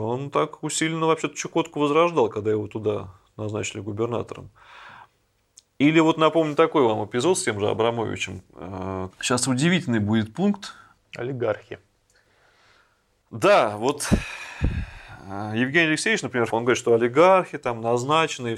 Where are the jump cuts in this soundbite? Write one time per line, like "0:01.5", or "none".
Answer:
0:09.1
0:16.5